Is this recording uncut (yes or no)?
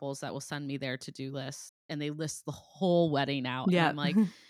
no